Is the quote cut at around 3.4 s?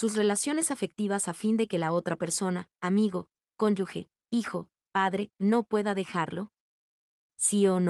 yes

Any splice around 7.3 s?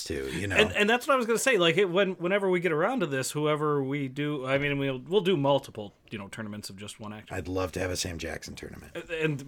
yes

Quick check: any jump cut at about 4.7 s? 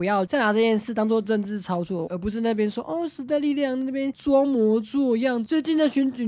no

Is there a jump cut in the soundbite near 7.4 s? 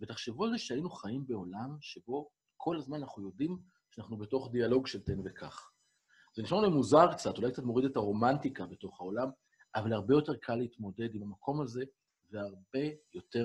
no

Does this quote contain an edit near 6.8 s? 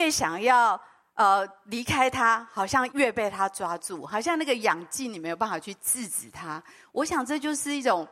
no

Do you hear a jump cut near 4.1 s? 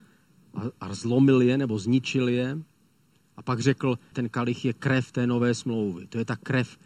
yes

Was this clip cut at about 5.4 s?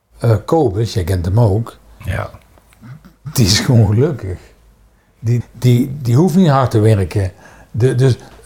yes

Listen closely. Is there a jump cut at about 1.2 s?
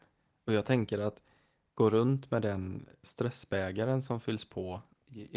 no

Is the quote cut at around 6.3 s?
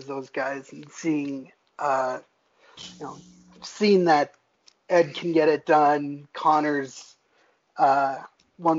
no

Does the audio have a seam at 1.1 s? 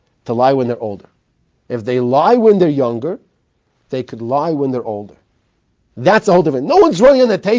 no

